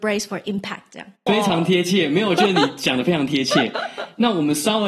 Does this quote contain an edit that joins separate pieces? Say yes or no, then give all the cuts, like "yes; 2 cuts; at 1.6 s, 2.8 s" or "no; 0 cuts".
yes; 1 cut; at 1.3 s